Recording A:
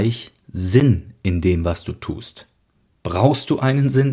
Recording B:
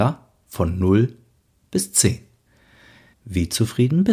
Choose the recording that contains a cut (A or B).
B